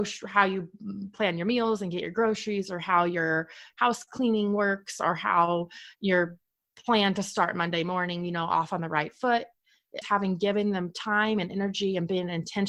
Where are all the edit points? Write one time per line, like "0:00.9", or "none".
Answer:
0:03.7
0:10.0